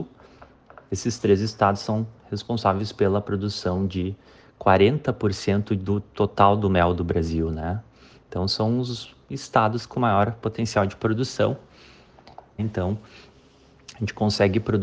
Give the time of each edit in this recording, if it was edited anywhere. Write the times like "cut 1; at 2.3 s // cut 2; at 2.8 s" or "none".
cut 1; at 12.6 s